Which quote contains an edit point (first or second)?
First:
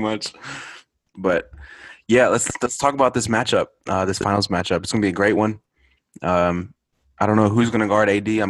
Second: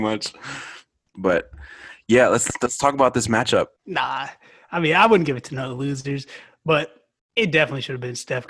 second